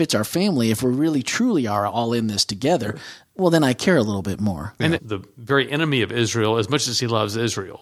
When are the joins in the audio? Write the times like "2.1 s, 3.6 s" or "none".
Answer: 5.0 s